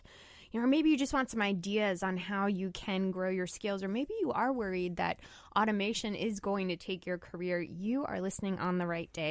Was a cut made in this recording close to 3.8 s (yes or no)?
no